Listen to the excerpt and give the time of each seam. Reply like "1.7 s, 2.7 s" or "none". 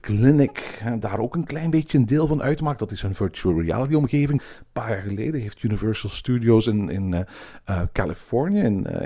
4.4 s